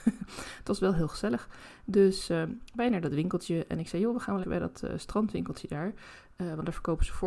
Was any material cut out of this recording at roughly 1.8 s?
no; 1 cut; at 4.4 s

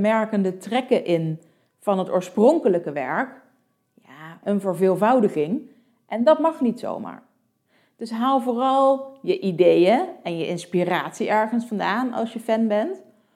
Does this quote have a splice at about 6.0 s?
no; 1 cut; at 4.4 s

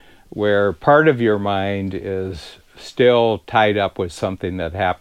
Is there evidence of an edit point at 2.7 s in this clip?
no; 0 cuts

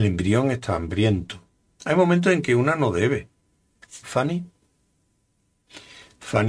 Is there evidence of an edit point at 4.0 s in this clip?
yes; 2 cuts; at 1.8 s, 4.0 s

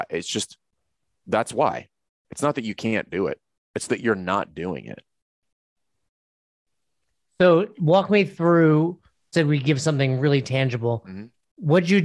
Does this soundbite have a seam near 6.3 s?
no; 1 cut; at 9.3 s

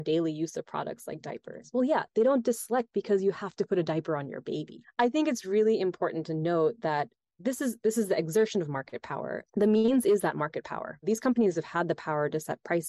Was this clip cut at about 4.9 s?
no; 1 cut; at 9.5 s

